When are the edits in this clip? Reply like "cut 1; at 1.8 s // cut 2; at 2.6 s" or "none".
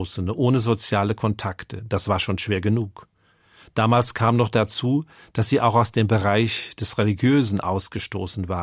none